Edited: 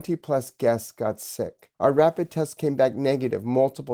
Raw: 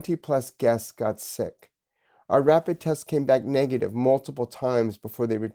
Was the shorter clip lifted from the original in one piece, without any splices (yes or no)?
no